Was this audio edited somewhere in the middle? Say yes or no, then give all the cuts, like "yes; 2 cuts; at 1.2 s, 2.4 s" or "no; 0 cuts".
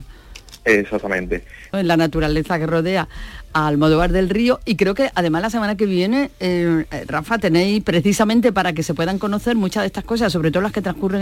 yes; 1 cut; at 1.7 s